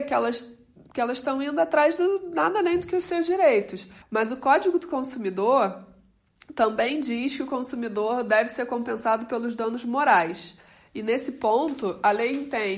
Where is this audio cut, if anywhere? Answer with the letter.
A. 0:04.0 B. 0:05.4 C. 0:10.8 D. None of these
A